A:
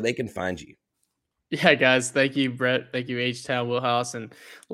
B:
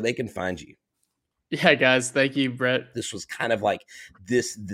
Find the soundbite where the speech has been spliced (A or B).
B